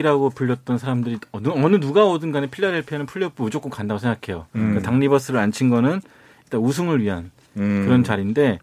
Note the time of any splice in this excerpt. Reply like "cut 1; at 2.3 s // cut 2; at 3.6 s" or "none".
none